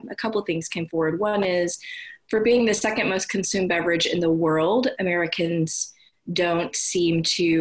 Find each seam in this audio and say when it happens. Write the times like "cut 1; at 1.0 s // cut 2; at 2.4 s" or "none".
cut 1; at 5.0 s